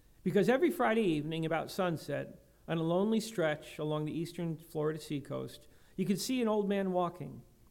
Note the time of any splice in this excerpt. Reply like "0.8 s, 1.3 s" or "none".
none